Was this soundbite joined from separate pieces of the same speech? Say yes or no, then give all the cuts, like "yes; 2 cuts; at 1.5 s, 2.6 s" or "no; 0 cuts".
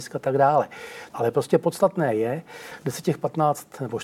yes; 1 cut; at 1.1 s